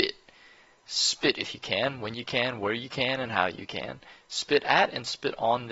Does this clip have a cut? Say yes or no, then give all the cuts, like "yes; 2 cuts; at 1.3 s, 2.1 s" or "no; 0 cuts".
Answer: no; 0 cuts